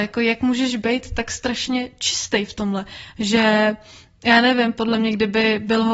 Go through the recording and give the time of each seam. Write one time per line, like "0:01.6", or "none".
none